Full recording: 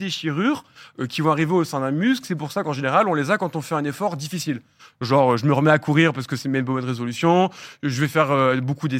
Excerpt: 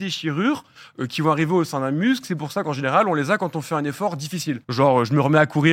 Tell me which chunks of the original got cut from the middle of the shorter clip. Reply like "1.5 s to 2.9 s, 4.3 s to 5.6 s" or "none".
4.6 s to 5.0 s